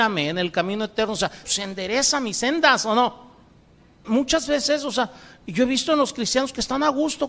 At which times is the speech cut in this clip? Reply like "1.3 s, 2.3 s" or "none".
1.4 s, 4.0 s